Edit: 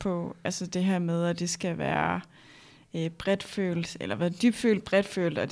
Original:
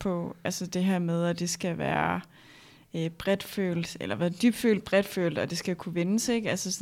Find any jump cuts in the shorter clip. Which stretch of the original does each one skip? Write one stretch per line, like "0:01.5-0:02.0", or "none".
none